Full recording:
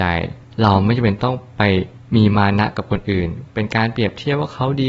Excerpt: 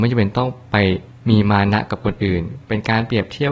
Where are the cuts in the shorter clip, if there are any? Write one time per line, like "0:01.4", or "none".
none